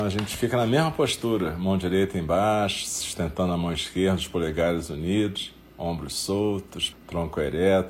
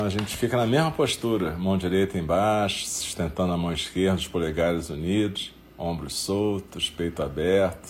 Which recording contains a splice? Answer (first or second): first